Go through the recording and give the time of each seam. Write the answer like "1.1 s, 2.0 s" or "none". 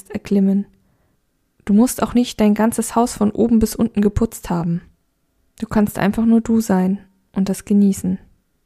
none